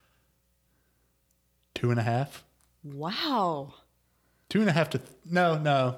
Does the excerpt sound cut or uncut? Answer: uncut